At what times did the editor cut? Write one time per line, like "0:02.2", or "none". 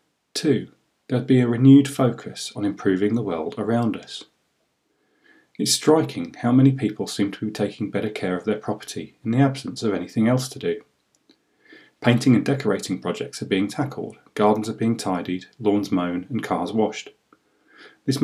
none